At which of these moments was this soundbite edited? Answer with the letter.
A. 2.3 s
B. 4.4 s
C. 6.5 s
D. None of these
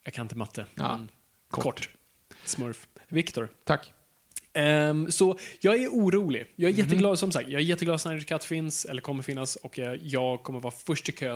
D